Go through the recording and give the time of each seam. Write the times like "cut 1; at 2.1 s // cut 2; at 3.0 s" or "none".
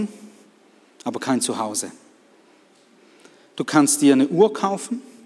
none